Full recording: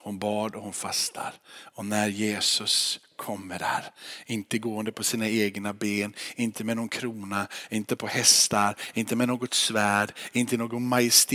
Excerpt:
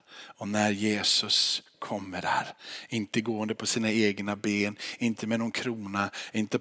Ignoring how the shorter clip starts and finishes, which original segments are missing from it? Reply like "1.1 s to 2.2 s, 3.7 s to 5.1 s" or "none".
none

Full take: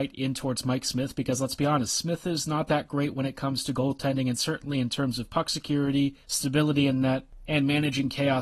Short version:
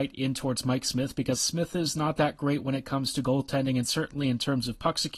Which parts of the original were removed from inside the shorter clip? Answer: 1.3 s to 1.9 s

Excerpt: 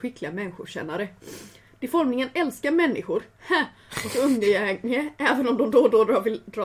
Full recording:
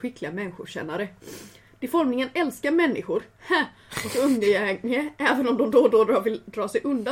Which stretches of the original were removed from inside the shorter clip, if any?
none

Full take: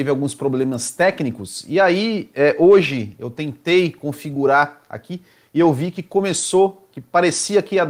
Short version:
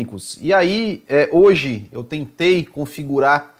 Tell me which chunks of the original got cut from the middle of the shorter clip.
none

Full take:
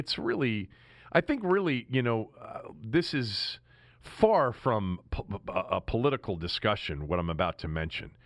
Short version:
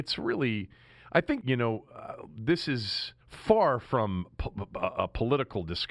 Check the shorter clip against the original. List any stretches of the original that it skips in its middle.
1.4 s to 1.9 s, 3.7 s to 3.9 s

